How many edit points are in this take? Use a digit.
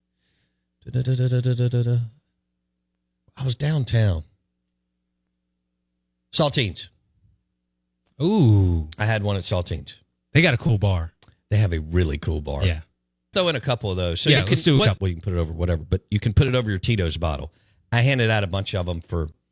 2